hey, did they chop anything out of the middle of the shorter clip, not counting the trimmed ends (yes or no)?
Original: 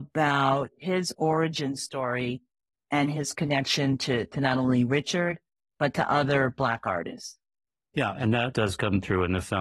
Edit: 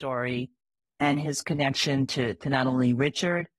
no